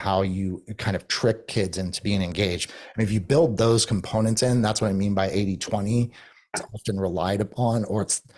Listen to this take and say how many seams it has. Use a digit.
2